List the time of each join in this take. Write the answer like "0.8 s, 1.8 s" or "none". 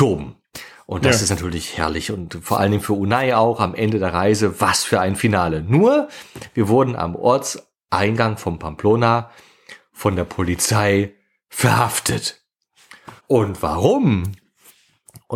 13.2 s